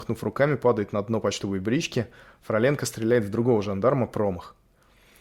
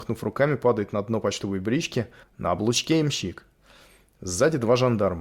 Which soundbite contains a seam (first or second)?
second